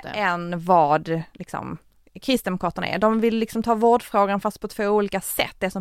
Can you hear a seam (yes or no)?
no